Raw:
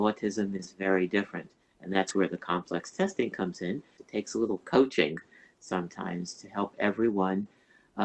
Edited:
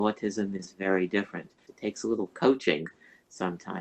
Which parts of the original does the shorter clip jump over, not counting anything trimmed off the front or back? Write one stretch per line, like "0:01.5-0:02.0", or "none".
0:01.6-0:03.9